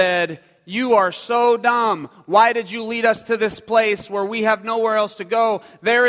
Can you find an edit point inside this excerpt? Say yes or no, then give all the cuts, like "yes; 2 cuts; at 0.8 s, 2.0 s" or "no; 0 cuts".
no; 0 cuts